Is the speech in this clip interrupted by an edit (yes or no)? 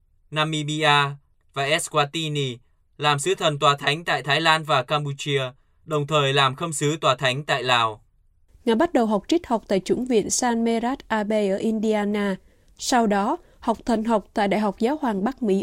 yes